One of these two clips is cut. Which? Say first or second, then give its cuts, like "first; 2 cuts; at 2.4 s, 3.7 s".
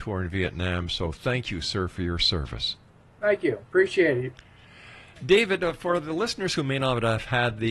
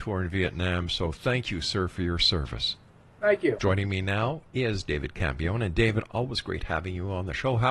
second; 1 cut; at 3.6 s